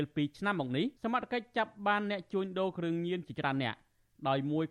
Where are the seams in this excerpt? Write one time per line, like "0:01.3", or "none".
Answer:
0:01.0

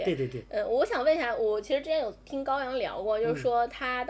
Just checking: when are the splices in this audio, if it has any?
none

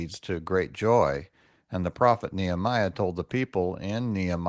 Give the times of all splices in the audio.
none

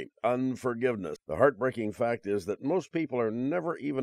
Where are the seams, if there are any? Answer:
0:01.2

